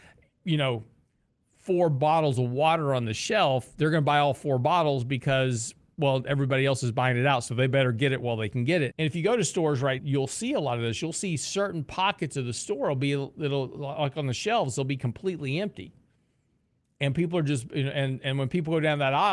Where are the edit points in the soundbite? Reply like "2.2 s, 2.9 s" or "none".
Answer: 8.9 s, 10.0 s